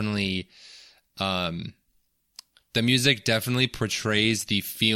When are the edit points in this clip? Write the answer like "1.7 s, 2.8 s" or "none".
none